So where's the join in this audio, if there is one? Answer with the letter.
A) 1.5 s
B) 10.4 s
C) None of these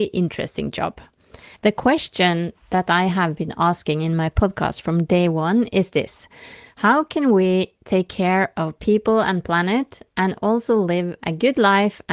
A